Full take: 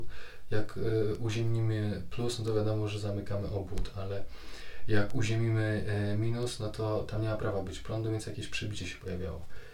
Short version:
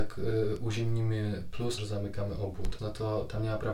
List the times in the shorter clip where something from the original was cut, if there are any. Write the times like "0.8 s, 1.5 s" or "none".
1.8 s, 2.8 s